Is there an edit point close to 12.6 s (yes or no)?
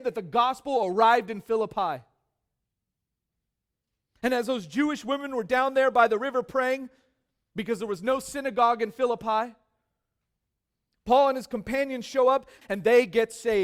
yes